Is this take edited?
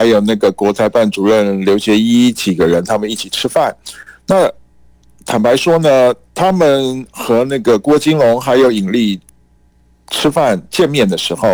no; 0 cuts

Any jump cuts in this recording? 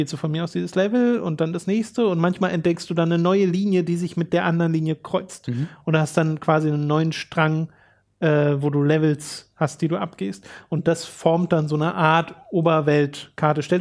no; 0 cuts

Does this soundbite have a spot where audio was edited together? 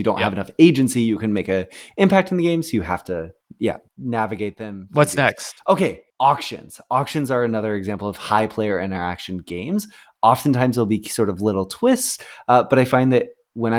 no; 0 cuts

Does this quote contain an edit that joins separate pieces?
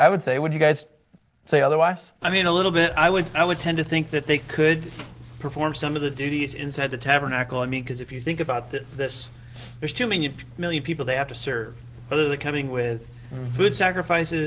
no; 0 cuts

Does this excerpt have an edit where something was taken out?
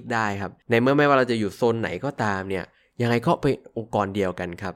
no; 0 cuts

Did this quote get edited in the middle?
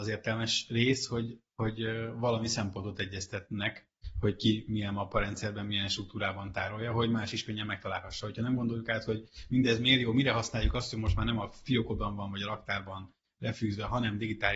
no; 0 cuts

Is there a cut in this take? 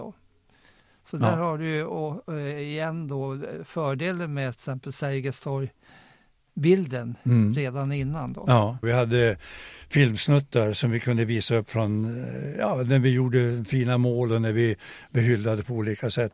yes; 1 cut; at 8.8 s

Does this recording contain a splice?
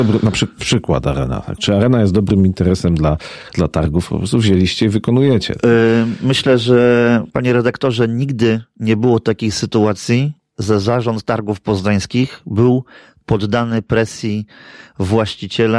no; 0 cuts

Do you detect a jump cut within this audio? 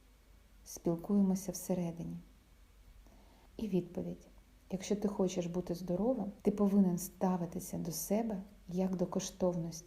yes; 2 cuts; at 3.4 s, 6.4 s

